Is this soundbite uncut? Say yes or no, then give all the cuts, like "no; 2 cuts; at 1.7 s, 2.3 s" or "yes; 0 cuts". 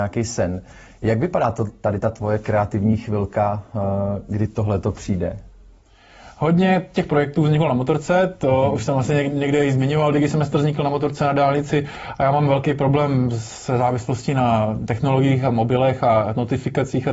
yes; 0 cuts